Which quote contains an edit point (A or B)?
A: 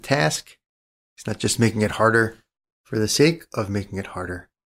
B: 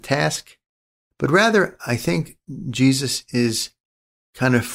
B